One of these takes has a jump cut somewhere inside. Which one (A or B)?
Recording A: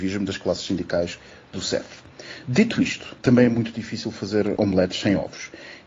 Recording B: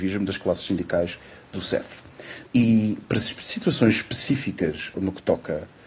B